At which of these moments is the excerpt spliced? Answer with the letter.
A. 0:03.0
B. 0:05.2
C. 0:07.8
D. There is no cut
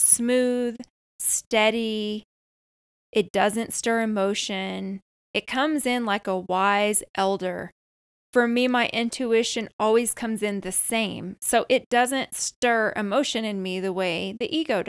D